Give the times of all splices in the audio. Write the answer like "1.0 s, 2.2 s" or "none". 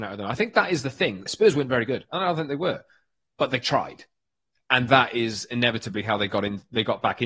1.3 s